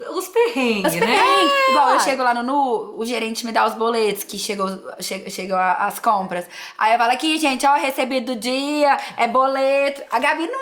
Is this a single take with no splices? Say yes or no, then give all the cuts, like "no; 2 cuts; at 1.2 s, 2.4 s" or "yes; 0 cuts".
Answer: yes; 0 cuts